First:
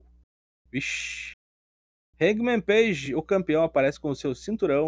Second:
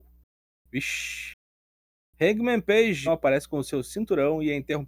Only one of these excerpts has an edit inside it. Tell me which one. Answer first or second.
second